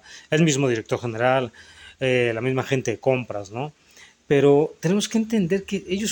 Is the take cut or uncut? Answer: uncut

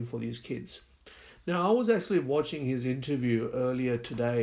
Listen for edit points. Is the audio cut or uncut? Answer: uncut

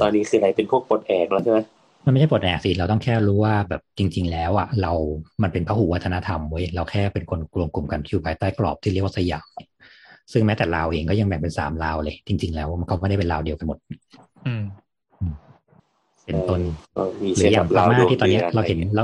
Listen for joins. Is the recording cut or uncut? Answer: uncut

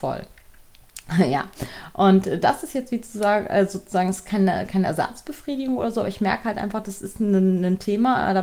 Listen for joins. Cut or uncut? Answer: uncut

